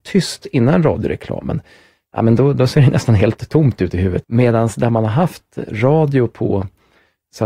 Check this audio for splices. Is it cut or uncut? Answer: cut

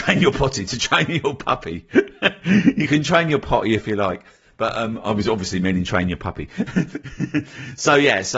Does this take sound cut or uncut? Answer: uncut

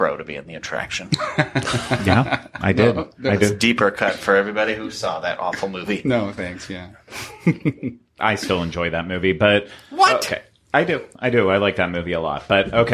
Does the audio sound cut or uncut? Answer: uncut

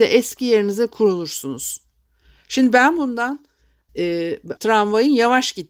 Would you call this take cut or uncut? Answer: cut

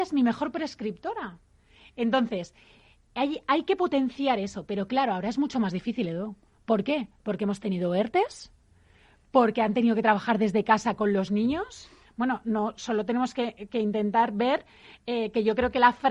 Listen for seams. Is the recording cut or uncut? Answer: uncut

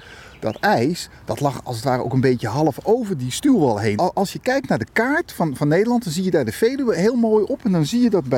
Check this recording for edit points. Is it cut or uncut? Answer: cut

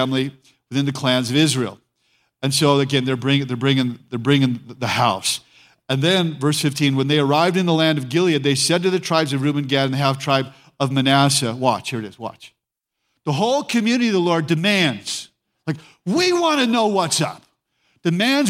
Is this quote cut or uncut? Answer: uncut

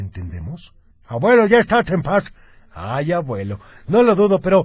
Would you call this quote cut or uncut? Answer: cut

